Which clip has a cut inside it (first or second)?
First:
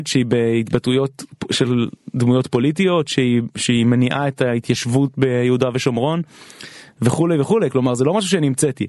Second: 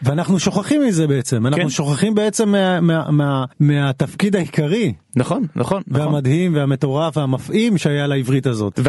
second